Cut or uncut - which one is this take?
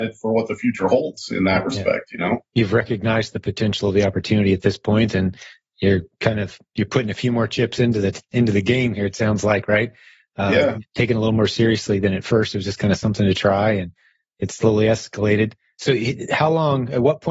uncut